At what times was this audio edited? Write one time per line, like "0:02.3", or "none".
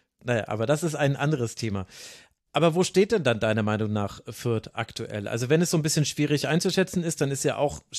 none